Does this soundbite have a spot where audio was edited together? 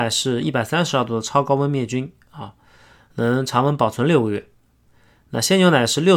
no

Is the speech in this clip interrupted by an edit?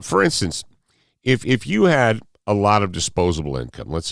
no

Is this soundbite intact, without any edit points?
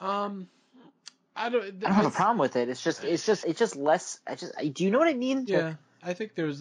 no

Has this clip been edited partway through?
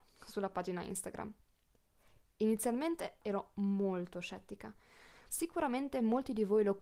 yes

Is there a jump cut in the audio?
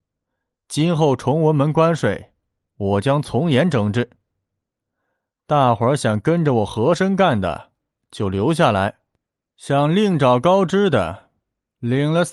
no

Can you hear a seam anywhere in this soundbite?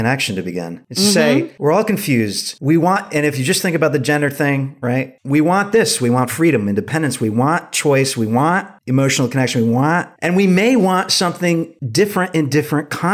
no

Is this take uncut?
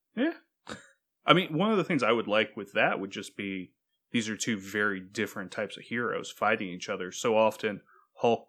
yes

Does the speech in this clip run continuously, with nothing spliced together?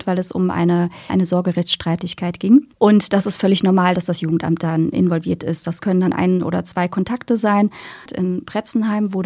no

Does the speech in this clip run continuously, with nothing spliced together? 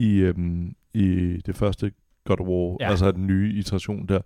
yes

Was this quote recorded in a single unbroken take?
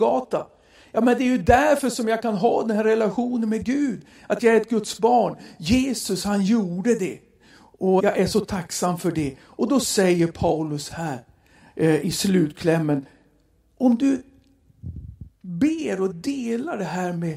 no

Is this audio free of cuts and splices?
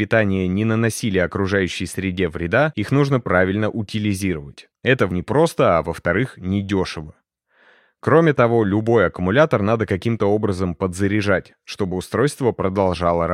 no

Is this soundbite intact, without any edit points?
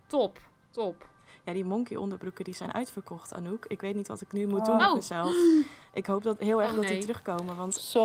yes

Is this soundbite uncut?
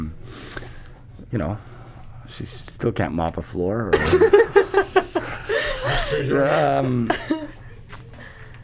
no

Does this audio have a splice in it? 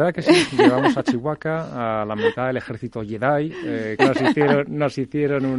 yes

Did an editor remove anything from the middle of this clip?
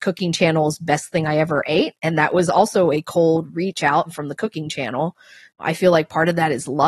no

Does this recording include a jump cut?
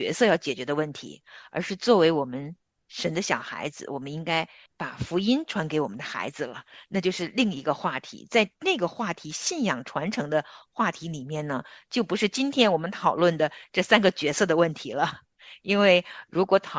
no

